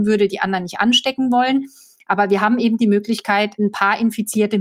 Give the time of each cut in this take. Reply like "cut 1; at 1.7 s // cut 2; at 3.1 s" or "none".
none